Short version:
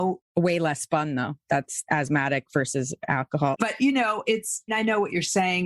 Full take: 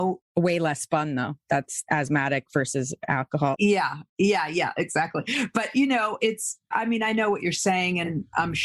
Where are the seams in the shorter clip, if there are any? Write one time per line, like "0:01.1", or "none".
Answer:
0:03.6
0:04.7